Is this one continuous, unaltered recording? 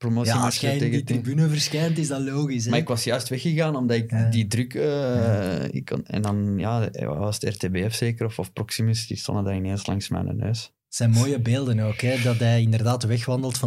yes; 0 cuts

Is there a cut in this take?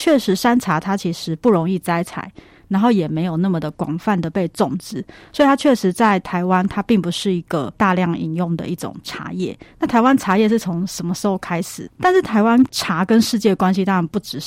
yes; 1 cut; at 11.9 s

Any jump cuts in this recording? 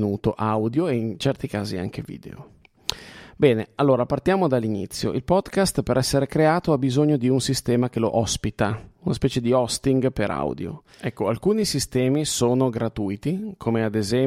no; 0 cuts

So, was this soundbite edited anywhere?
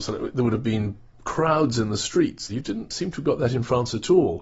yes; 1 cut; at 2.5 s

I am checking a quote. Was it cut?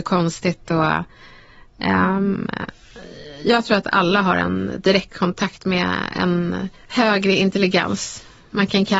yes; 1 cut; at 6.8 s

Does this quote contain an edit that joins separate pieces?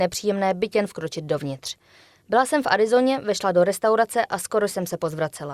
no; 0 cuts

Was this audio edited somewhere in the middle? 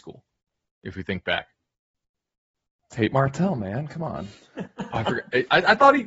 no; 0 cuts

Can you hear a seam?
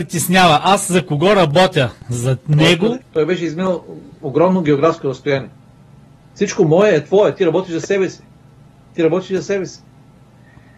yes; 2 cuts; at 3.0 s, 6.2 s

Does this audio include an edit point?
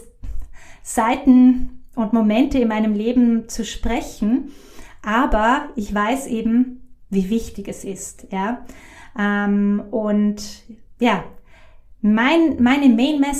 no; 0 cuts

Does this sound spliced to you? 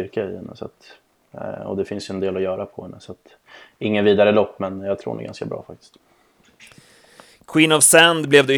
no; 0 cuts

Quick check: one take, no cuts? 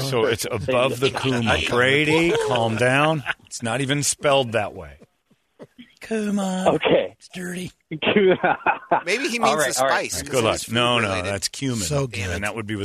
yes; 0 cuts

